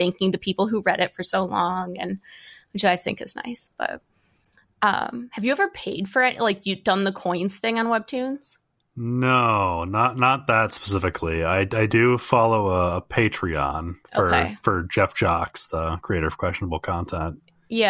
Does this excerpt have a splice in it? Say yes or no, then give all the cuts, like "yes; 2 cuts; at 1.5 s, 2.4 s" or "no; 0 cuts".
yes; 1 cut; at 14.0 s